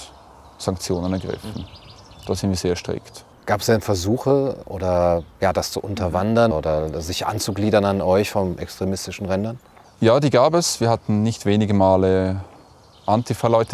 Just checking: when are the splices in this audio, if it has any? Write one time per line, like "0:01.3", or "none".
0:06.5